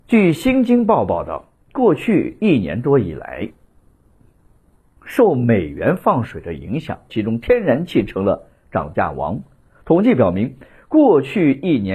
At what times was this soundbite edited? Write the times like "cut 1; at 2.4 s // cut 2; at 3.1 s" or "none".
cut 1; at 7.1 s